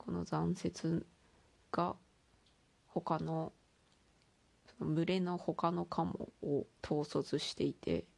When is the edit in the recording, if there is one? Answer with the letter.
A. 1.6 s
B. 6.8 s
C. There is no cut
B